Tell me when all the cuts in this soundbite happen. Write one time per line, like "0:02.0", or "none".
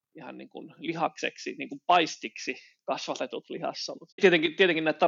0:04.1